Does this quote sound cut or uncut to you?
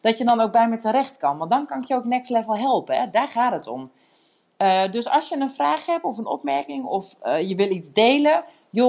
uncut